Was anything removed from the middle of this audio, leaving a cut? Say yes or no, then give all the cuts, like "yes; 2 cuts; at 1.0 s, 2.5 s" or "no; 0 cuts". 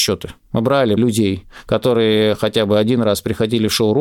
yes; 1 cut; at 1.0 s